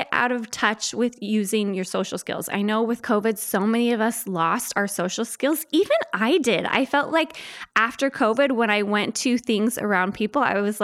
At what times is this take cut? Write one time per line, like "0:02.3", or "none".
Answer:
none